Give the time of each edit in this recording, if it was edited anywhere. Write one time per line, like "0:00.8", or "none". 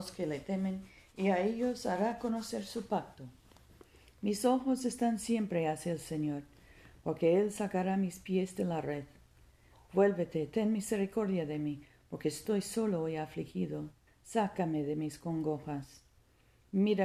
0:14.1